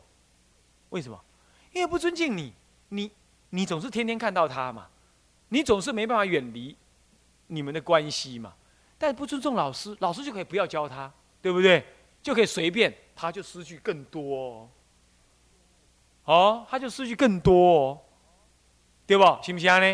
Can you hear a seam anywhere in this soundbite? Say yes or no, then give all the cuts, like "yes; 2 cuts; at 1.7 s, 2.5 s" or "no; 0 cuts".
no; 0 cuts